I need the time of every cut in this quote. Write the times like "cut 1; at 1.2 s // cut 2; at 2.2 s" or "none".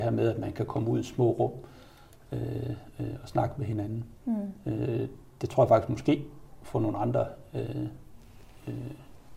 none

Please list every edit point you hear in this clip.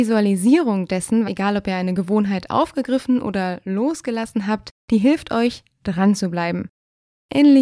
cut 1; at 1.2 s

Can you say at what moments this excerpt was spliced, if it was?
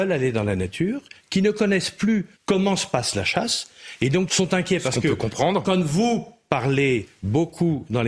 cut 1; at 2.4 s // cut 2; at 4.3 s

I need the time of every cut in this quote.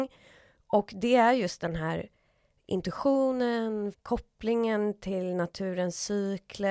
cut 1; at 3.9 s

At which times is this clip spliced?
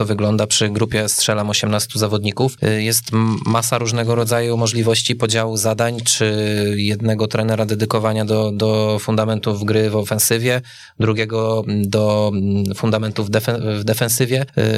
none

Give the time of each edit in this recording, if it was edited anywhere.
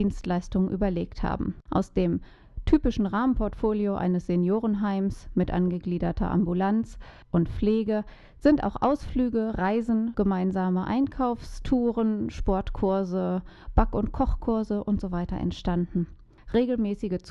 cut 1; at 10.1 s

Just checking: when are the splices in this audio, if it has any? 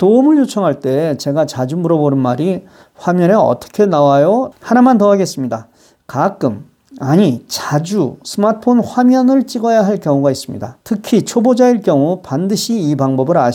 cut 1; at 4.5 s // cut 2; at 10.8 s

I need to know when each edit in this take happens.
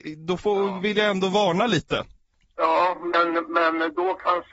none

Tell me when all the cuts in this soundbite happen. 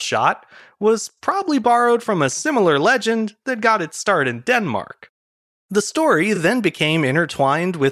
none

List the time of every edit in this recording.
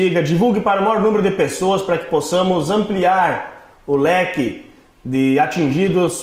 none

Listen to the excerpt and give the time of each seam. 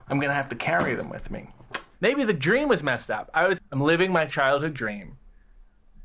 cut 1; at 1.9 s // cut 2; at 3.6 s

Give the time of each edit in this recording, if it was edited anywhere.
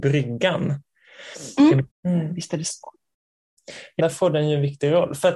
cut 1; at 1.9 s // cut 2; at 4.0 s

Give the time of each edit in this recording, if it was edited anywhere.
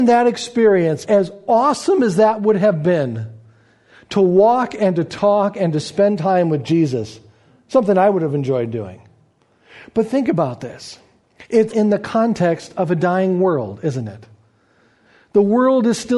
cut 1; at 1.0 s // cut 2; at 11.7 s

